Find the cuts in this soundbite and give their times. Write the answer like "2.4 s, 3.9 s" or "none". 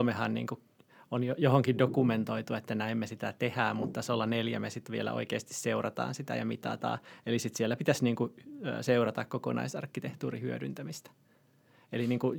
none

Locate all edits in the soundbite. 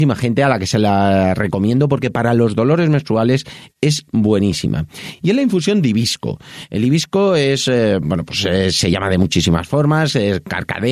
none

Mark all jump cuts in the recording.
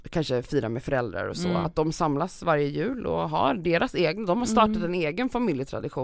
none

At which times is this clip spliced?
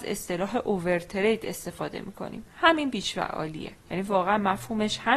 3.8 s

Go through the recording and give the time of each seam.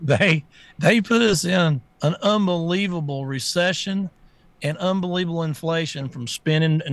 1.9 s

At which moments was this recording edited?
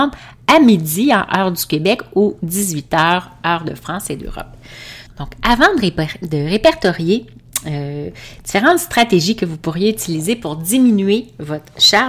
5.1 s

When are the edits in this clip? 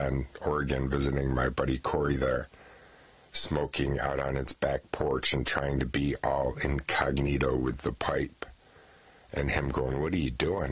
none

